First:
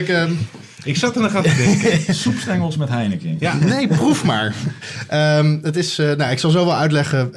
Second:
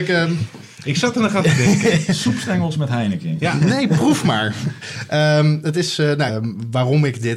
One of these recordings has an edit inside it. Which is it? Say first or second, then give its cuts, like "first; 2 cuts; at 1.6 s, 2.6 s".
second; 1 cut; at 6.3 s